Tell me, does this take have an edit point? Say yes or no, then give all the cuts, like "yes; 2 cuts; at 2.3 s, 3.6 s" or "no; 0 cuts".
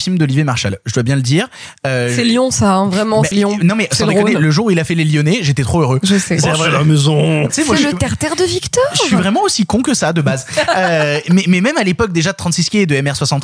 yes; 2 cuts; at 3.3 s, 7.5 s